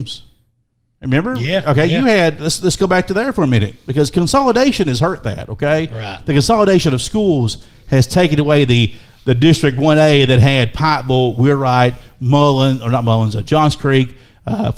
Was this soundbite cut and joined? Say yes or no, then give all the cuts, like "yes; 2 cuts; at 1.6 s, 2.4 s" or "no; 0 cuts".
no; 0 cuts